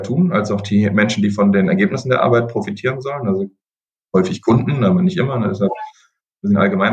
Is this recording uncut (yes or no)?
yes